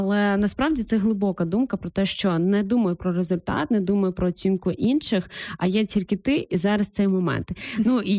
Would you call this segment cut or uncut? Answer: uncut